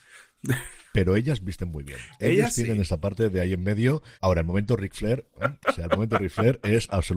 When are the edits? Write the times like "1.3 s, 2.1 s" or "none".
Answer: 4.1 s, 5.4 s